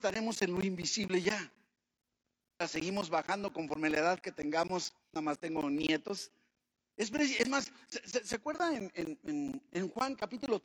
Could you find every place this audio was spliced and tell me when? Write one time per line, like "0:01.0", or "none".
0:02.6
0:05.1
0:06.9